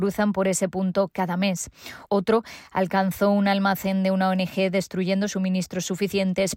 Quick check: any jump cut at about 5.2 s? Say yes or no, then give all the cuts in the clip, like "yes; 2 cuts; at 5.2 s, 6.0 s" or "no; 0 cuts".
no; 1 cut; at 2.1 s